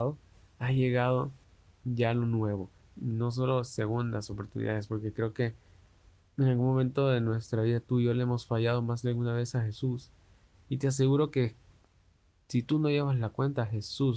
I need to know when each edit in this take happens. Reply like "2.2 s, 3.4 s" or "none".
2.8 s, 10.6 s